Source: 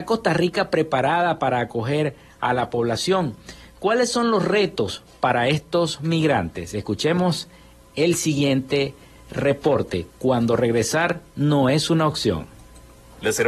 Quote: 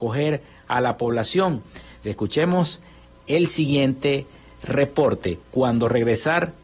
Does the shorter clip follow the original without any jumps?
no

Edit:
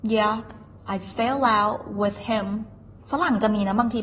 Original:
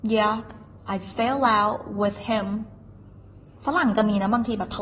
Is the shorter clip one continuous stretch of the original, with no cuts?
no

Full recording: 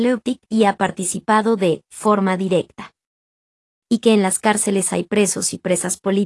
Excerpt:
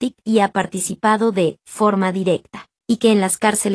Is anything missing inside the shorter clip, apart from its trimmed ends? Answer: yes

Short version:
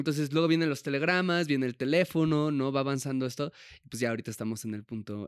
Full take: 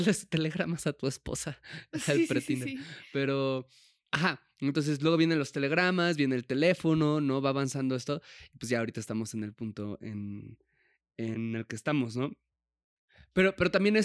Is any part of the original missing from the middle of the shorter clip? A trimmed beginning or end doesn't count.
no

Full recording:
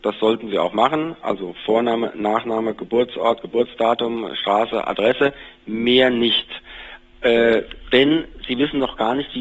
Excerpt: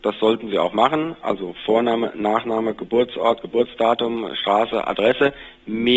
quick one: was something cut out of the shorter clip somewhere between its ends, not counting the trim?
no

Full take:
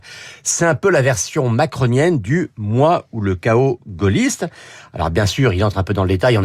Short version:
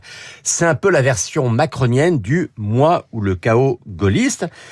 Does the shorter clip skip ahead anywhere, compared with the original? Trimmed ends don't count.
no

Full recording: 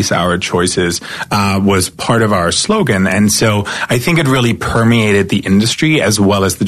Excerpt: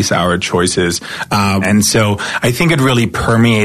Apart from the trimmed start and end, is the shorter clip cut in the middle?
yes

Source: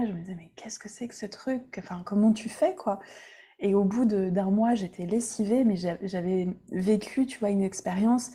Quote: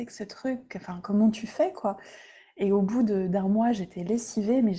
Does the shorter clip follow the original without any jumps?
yes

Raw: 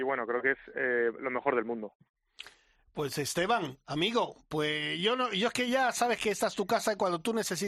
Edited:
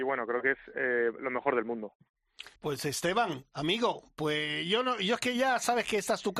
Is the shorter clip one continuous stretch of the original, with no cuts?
no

